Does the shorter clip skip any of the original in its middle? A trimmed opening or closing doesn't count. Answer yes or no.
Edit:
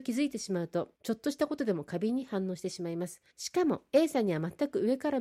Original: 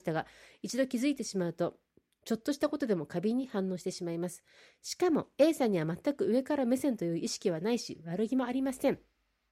yes